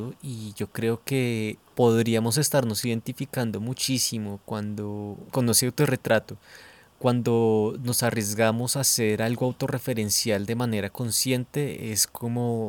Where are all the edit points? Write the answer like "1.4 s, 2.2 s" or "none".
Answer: 5.3 s

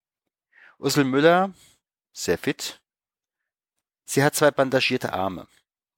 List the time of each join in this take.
none

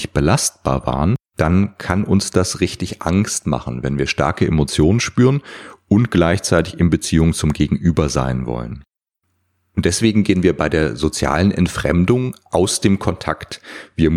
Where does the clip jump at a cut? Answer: 1.2 s

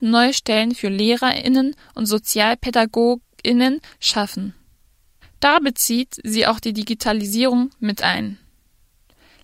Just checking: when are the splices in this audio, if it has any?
5.2 s

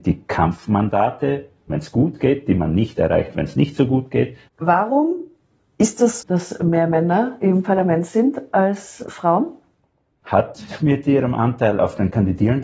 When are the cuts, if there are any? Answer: 1.7 s, 4.5 s, 6.2 s

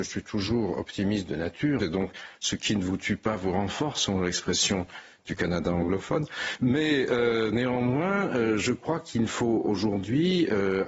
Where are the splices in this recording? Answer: 1.8 s

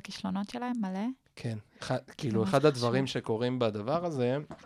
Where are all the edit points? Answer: none

